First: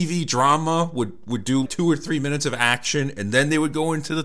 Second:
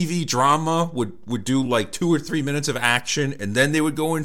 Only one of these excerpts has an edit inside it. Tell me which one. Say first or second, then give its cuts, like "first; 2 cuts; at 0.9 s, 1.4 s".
first; 1 cut; at 1.7 s